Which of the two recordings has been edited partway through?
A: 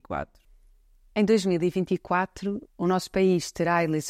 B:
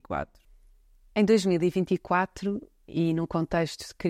A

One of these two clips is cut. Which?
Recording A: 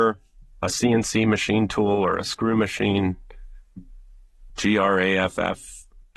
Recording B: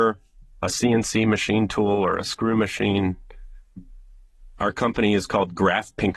A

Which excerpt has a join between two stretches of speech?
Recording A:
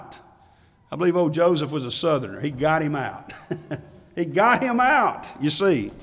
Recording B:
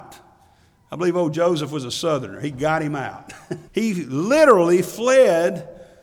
B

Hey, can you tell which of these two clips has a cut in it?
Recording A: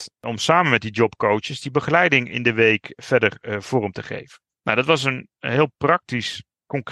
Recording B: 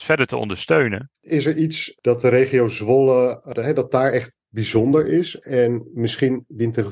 B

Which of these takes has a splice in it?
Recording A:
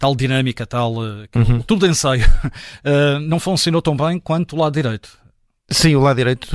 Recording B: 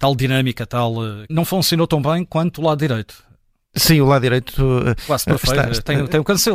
B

